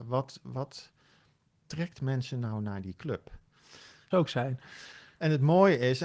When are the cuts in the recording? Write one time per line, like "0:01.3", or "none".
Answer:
0:04.1